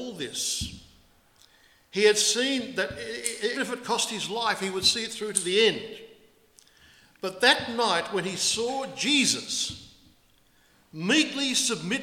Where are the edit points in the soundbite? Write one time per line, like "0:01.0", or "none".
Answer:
0:03.5